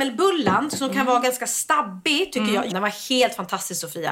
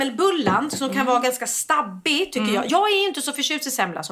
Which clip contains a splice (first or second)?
first